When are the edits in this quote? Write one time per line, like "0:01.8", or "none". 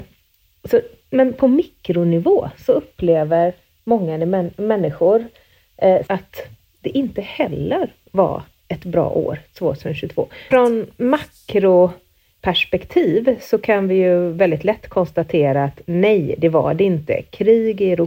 0:06.1
0:10.5